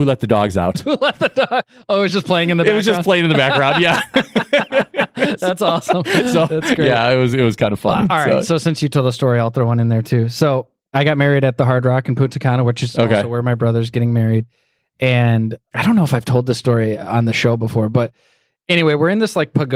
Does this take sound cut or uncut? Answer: uncut